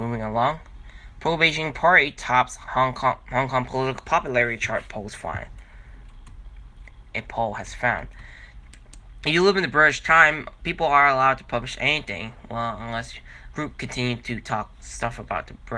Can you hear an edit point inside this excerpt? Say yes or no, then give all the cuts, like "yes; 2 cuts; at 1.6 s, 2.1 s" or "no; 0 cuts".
yes; 3 cuts; at 7.1 s, 8.5 s, 13.5 s